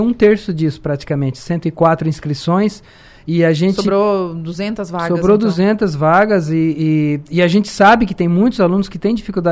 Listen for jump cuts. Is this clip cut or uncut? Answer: uncut